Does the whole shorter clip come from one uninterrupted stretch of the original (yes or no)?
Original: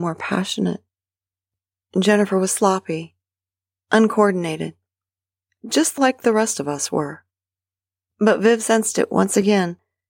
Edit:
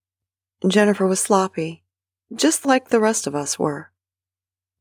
no